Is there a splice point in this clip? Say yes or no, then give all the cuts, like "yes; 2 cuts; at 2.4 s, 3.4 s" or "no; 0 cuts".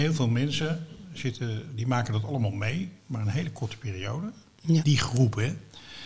yes; 1 cut; at 4.8 s